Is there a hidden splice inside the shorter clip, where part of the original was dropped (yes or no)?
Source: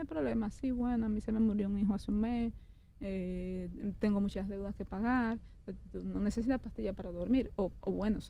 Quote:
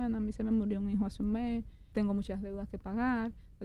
yes